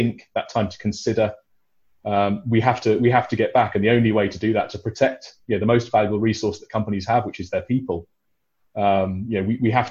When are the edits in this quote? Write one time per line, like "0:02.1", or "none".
none

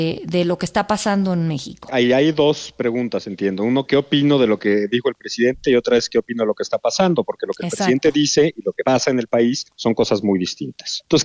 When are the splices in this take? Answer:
none

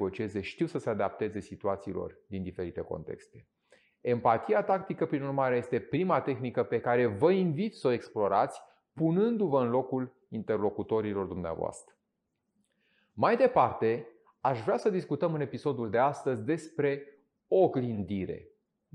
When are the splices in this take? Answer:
none

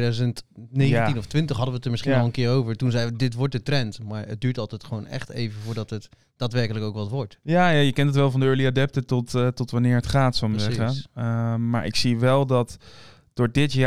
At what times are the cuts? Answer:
none

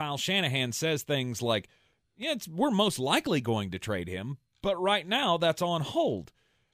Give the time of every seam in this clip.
none

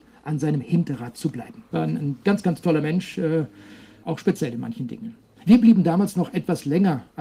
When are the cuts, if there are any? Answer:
0:01.7
0:04.0
0:05.4

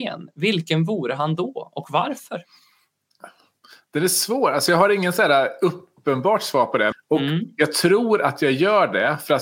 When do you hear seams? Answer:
0:06.9

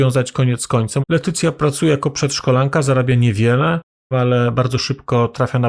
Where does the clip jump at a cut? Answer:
0:01.0
0:04.1

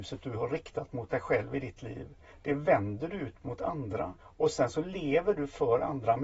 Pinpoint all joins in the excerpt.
0:04.2

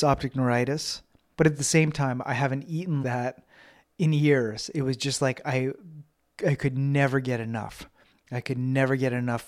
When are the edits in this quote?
0:01.3
0:03.0

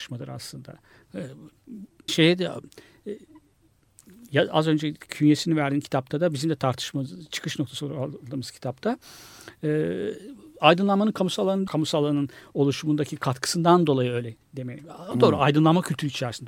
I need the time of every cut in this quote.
0:02.1

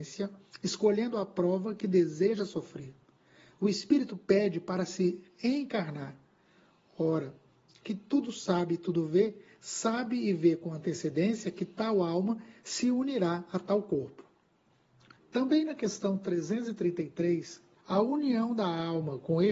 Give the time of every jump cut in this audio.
0:07.8
0:15.2
0:17.8

